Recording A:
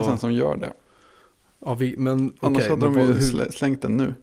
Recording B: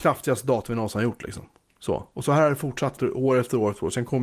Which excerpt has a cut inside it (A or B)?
B